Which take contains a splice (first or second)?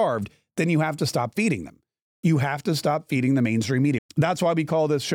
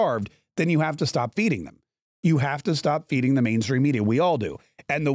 first